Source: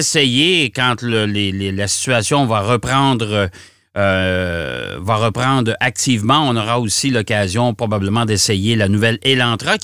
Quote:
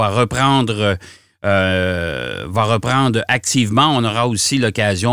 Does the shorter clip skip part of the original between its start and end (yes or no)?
no